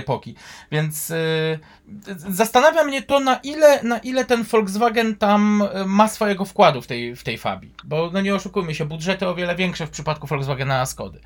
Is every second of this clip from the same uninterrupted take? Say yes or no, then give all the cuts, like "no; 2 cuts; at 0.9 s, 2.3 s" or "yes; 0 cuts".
yes; 0 cuts